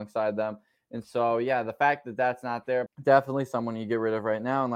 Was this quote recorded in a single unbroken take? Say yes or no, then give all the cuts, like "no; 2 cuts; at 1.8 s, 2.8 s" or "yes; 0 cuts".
no; 1 cut; at 2.9 s